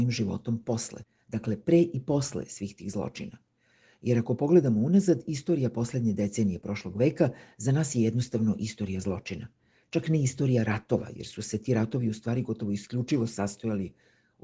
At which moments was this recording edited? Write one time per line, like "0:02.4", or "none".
none